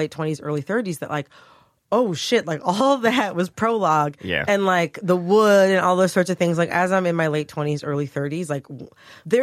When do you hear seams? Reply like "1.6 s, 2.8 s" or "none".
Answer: 4.5 s